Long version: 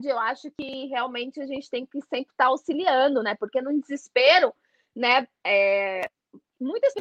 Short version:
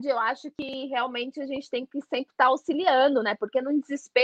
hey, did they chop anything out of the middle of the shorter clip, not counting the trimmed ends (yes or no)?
no